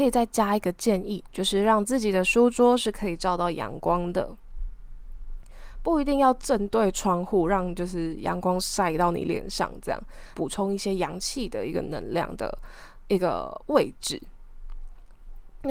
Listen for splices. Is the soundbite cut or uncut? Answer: cut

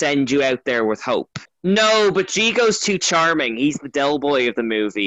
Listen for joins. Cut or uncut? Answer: cut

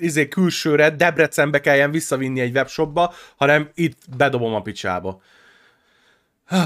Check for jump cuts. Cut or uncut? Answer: uncut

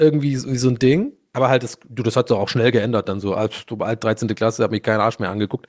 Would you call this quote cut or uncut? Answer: uncut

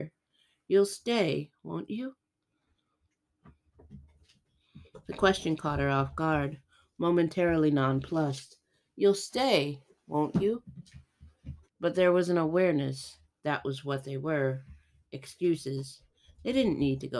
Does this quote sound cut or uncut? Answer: cut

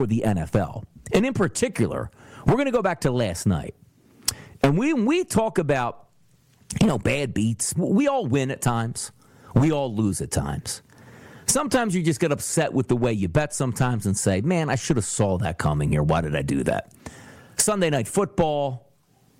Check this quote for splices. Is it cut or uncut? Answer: cut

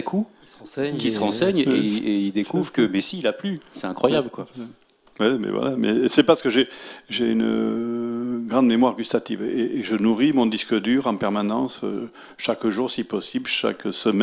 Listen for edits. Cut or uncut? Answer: uncut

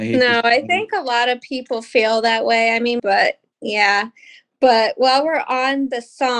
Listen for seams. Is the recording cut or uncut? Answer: cut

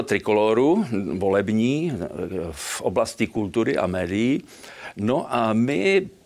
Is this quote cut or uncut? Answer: cut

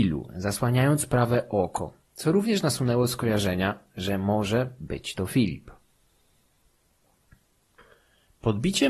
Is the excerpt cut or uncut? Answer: uncut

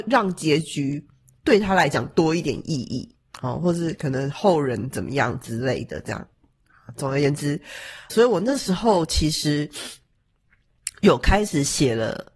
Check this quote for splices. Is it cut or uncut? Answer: cut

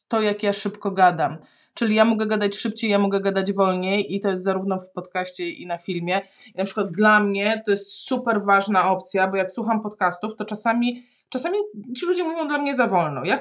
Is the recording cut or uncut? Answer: uncut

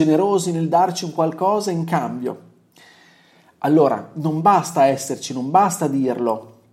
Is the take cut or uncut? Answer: uncut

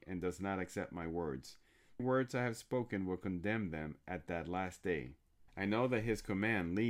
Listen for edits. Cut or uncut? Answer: cut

